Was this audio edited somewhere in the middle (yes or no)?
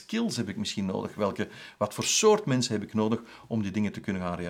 no